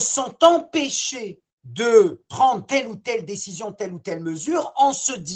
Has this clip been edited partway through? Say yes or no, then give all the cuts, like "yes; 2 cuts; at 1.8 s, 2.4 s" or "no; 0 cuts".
no; 0 cuts